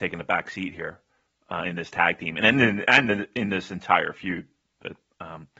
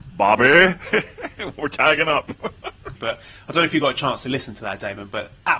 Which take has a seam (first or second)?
second